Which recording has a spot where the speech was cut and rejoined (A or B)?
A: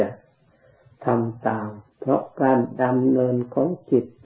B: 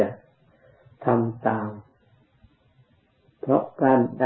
A